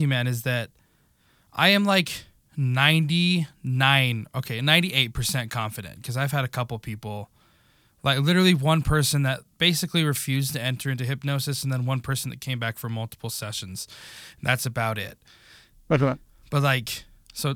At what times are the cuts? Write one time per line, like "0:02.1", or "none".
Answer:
none